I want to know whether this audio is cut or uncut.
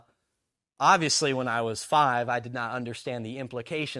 uncut